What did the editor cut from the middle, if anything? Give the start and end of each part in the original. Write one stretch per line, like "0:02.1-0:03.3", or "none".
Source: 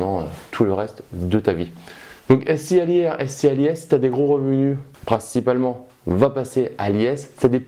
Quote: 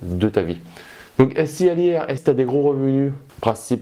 0:03.3-0:03.8